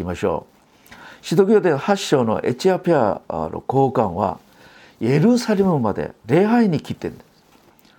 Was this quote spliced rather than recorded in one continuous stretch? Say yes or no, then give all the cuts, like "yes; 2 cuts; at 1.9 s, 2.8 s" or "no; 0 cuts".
no; 0 cuts